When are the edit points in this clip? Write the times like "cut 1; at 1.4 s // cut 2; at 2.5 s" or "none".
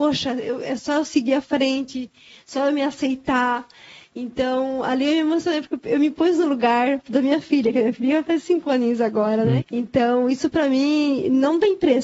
cut 1; at 9.6 s